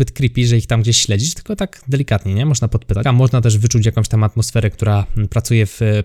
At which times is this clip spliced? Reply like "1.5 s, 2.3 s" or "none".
3.0 s